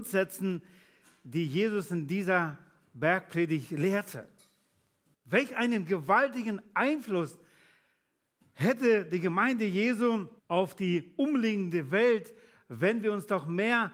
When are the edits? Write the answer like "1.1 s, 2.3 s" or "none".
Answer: 5.1 s, 10.4 s